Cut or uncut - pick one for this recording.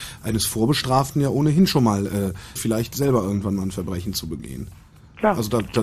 cut